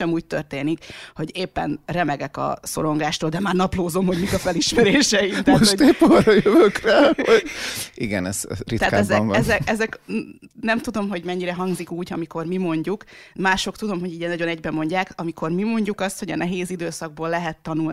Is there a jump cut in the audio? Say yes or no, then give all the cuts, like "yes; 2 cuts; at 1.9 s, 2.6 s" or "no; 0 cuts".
no; 0 cuts